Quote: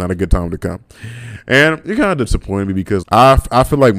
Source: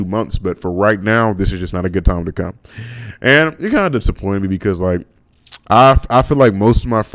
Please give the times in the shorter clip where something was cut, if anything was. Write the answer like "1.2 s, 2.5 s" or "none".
3.0 s